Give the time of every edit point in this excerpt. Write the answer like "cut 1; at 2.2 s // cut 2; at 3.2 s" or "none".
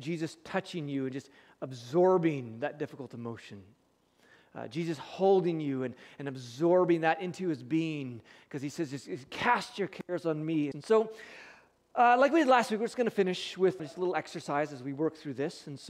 cut 1; at 10.7 s // cut 2; at 13.8 s